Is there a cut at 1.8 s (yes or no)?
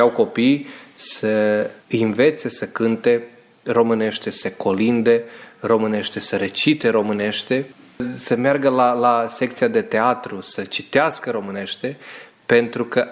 yes